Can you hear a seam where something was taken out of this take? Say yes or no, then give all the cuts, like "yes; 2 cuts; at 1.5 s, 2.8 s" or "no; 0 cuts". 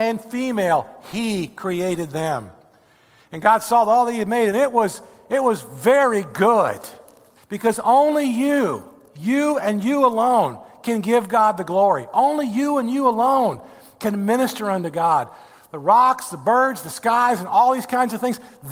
yes; 1 cut; at 7.4 s